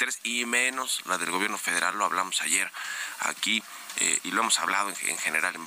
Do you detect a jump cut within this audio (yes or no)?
no